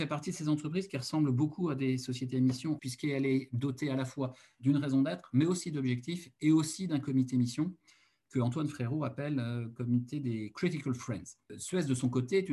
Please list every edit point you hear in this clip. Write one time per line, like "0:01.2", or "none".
0:02.8